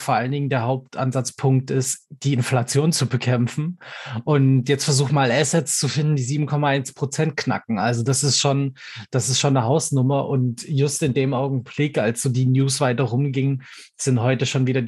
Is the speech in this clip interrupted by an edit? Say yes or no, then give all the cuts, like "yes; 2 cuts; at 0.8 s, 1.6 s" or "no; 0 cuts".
no; 0 cuts